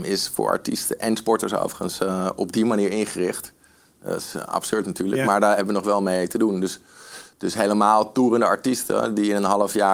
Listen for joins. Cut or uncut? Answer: uncut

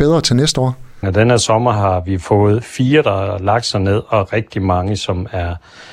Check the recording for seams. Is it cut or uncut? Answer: cut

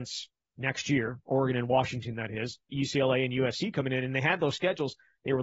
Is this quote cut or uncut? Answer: cut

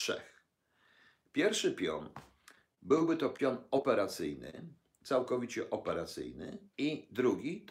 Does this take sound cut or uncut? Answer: cut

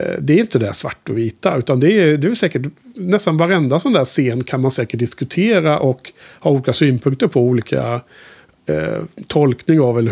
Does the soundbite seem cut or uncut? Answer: uncut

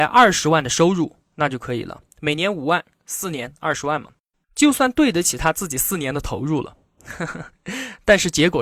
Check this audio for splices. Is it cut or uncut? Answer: uncut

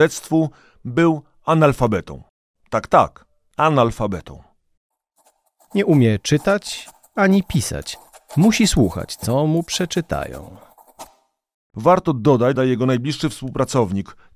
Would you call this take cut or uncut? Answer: cut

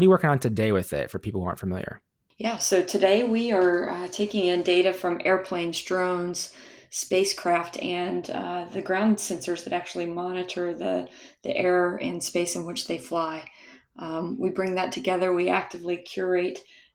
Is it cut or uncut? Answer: uncut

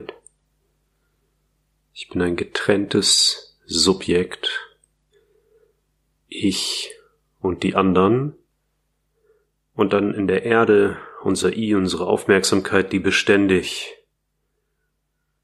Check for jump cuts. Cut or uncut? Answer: uncut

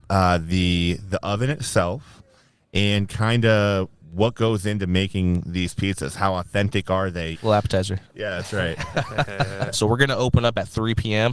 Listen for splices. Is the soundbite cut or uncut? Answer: cut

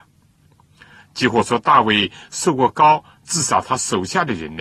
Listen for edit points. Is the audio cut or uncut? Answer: cut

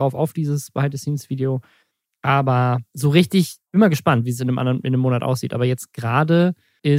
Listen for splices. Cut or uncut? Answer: uncut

